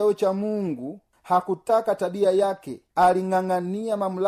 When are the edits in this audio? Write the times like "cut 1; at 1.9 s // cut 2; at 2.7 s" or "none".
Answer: cut 1; at 2.9 s